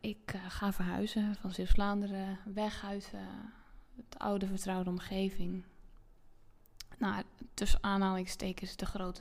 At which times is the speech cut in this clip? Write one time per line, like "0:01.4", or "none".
none

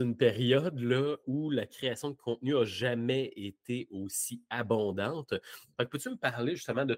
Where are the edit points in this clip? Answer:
0:01.2

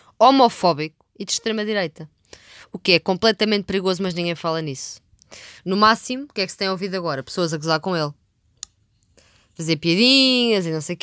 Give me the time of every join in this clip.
none

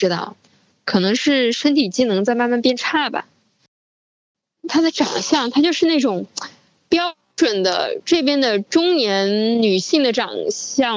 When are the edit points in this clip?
none

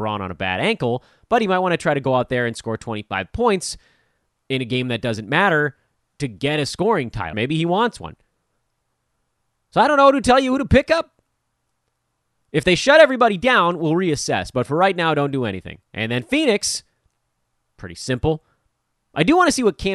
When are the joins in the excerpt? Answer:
0:07.3
0:15.8

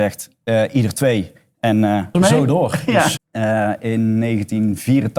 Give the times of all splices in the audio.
0:02.1
0:03.2

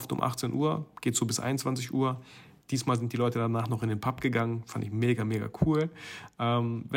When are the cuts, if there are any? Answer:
none

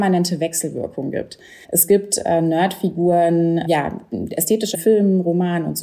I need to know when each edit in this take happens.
0:01.6
0:03.7
0:04.7

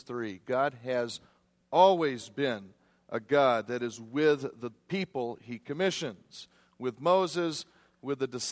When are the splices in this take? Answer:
none

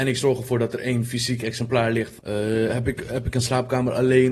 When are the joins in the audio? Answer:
0:02.2

